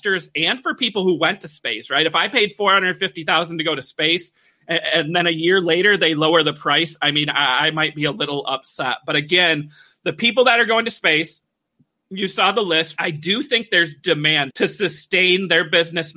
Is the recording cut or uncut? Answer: cut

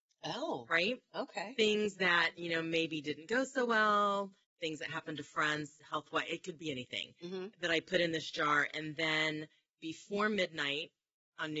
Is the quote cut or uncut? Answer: cut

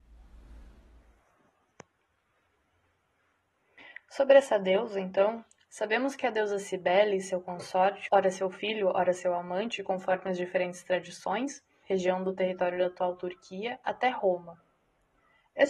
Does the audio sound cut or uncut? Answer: cut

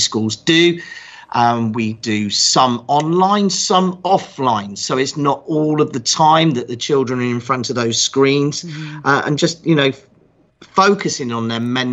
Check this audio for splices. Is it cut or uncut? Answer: uncut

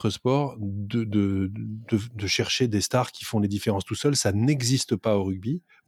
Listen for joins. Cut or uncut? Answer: uncut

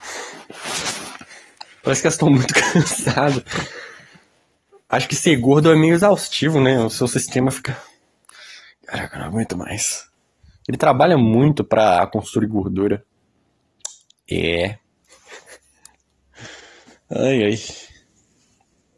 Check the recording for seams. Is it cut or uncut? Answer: uncut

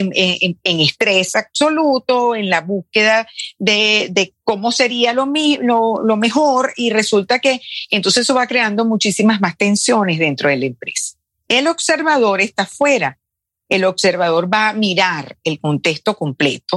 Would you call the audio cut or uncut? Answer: uncut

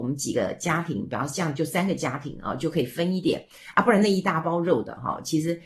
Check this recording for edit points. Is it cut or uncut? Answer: uncut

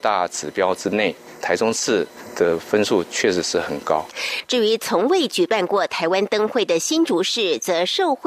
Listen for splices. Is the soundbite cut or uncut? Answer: uncut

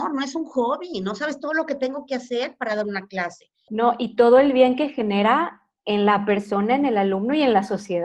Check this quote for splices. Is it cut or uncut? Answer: cut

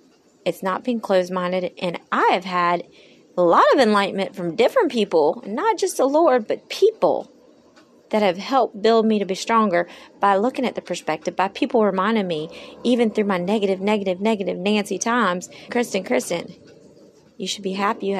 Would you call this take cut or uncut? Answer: cut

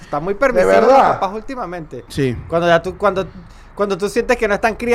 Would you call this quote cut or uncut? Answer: cut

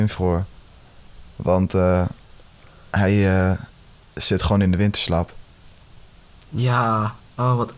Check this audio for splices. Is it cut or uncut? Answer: uncut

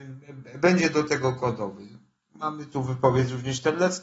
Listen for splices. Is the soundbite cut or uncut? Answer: uncut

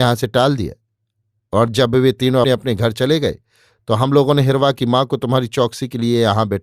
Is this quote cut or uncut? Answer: cut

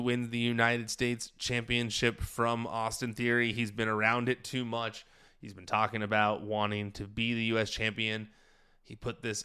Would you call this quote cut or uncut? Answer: uncut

